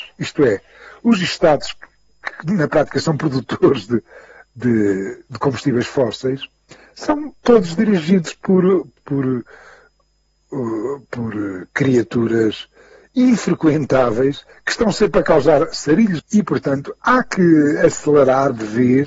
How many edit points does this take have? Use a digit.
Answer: 2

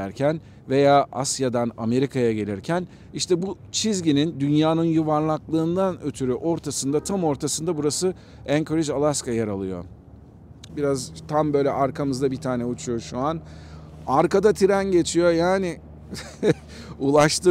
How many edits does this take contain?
1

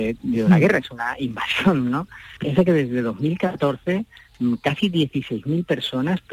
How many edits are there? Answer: 1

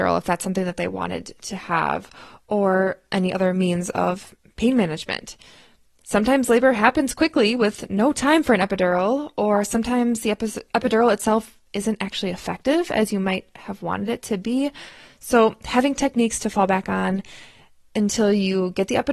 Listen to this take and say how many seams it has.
0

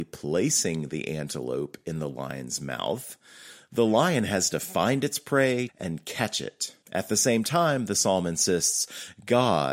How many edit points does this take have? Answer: 2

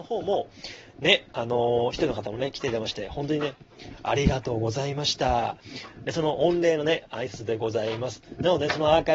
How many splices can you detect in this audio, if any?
0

